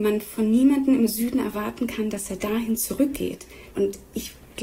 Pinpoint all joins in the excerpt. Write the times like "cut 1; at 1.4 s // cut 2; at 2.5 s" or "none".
cut 1; at 3.7 s